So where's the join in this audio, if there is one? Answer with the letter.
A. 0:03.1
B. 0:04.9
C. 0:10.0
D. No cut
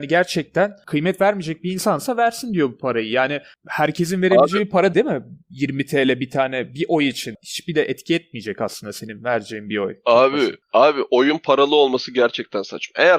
B